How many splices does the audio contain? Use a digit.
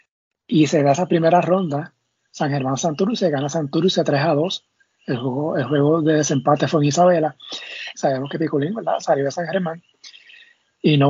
1